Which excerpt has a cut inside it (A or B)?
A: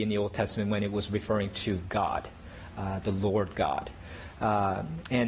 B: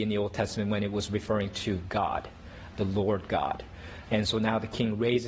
B